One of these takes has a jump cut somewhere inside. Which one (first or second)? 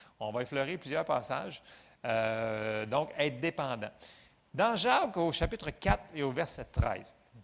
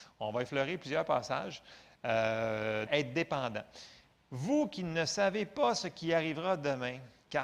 second